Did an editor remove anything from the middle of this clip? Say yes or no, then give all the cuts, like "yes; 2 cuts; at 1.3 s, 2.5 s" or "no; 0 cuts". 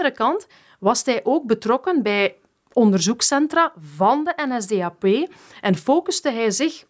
no; 0 cuts